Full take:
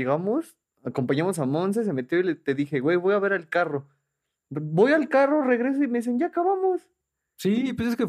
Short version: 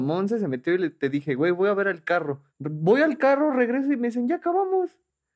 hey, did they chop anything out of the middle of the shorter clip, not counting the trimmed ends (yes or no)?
yes